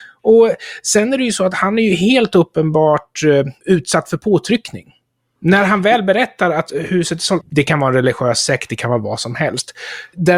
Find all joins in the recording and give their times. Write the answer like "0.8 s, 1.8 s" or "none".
7.4 s